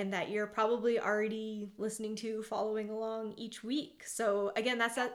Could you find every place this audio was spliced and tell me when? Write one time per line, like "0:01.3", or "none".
none

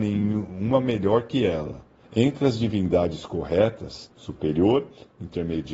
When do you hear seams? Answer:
0:02.0
0:04.1

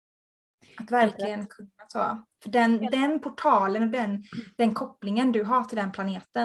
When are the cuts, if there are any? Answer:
none

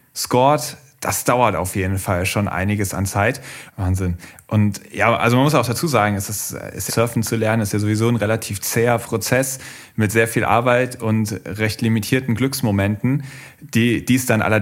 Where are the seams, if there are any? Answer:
0:03.7
0:06.9

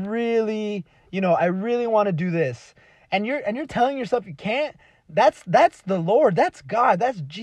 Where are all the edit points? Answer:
none

